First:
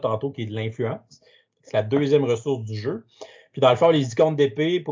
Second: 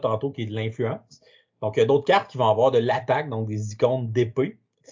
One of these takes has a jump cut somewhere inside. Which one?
first; 1 cut; at 1.5 s

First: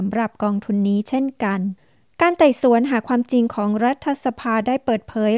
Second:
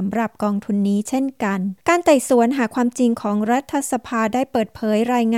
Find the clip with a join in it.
second; 1 cut; at 1.8 s

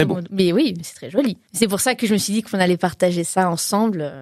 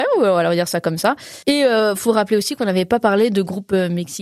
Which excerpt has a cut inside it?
second; 1 cut; at 1.4 s

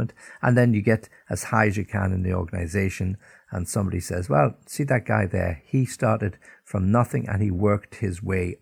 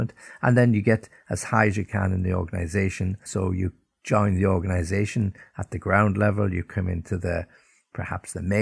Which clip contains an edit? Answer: second; 1 cut; at 3.3 s

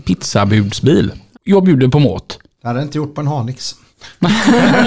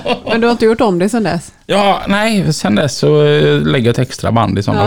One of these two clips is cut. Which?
first; 2 cuts; at 1.3 s, 2.6 s

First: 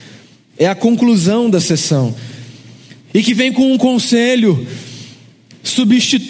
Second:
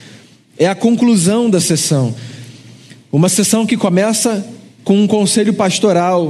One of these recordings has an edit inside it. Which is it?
first; 1 cut; at 3.0 s

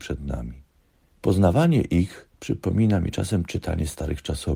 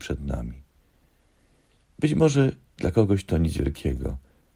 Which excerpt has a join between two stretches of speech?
first; 2 cuts; at 1.1 s, 2.3 s

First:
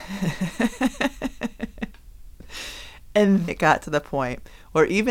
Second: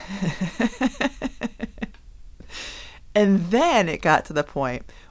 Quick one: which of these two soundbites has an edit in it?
first; 1 cut; at 3.5 s

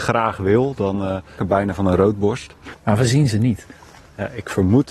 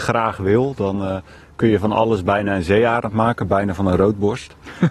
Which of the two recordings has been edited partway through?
first; 2 cuts; at 1.4 s, 2.7 s

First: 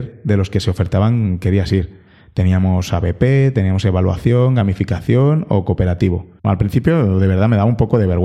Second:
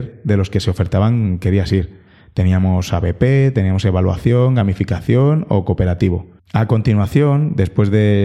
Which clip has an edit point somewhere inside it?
first; 1 cut; at 6.4 s

